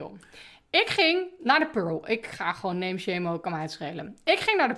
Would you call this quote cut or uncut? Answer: uncut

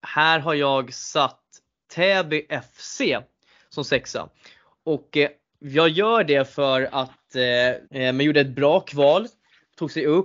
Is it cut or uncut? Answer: cut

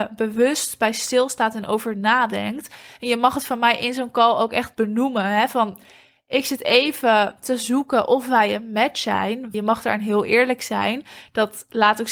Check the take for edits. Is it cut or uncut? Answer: cut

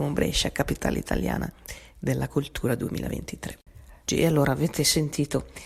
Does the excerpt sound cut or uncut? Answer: cut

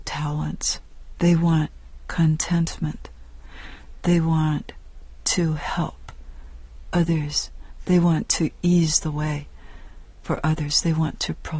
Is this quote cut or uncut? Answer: cut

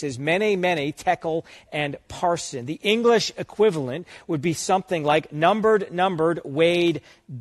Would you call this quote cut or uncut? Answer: uncut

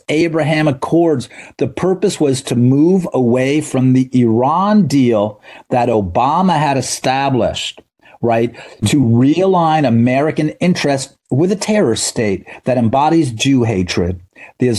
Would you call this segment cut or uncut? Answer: uncut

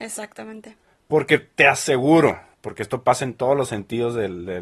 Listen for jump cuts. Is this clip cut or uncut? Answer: cut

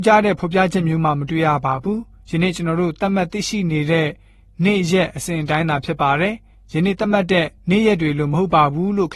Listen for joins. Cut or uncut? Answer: cut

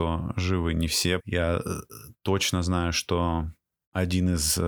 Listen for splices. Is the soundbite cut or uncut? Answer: cut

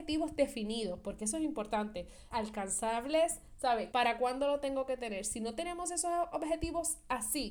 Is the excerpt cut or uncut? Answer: cut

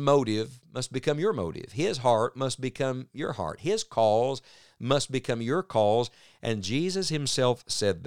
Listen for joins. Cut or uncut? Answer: uncut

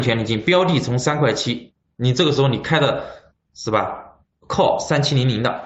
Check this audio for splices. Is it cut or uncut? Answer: uncut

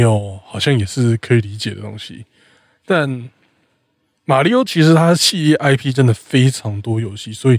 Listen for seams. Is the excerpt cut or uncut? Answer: uncut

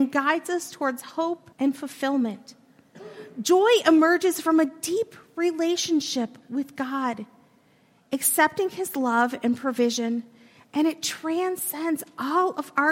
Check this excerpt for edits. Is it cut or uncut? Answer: cut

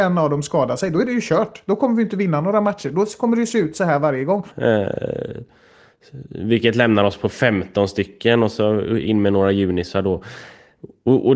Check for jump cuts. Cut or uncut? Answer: cut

